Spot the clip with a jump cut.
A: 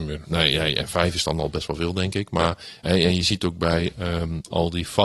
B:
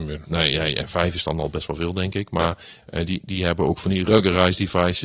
B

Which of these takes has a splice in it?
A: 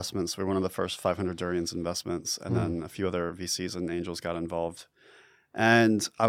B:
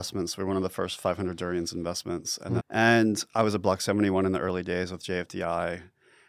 B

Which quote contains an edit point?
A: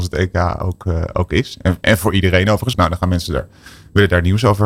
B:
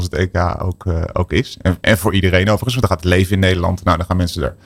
A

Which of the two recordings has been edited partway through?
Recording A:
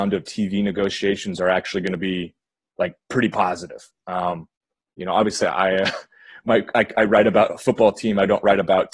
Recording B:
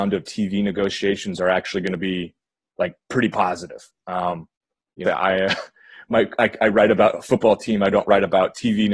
B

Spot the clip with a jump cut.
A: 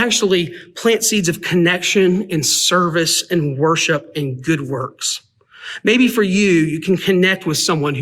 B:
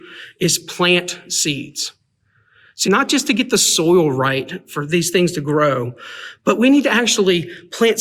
B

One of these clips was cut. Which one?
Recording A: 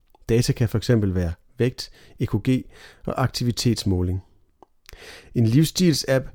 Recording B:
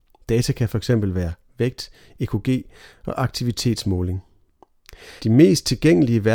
B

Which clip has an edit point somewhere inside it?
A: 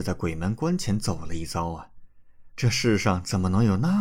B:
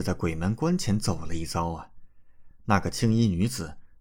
A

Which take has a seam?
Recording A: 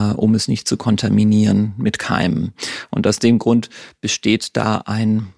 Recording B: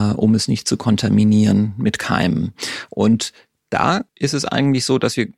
B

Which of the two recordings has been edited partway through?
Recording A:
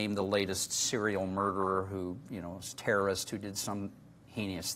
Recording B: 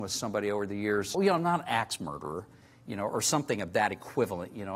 B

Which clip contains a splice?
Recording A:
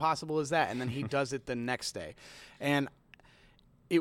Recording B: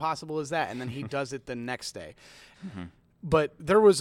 B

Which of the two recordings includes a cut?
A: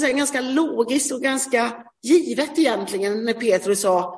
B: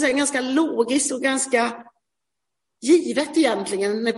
A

